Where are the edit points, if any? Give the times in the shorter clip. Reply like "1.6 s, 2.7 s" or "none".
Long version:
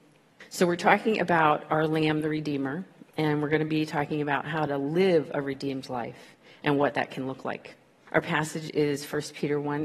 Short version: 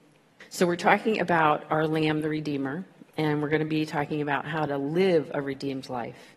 none